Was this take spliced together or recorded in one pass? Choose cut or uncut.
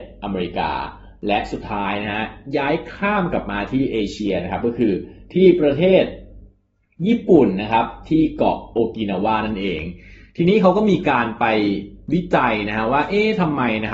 uncut